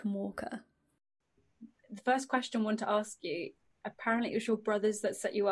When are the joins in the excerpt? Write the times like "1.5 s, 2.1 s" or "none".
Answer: none